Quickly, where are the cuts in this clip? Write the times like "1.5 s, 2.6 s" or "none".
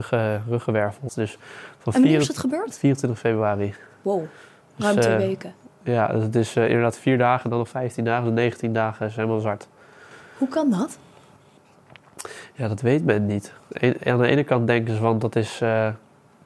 1.1 s